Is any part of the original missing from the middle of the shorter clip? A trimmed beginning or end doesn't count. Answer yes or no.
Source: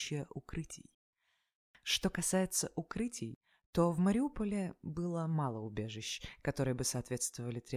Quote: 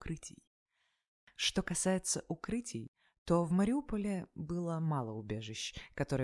no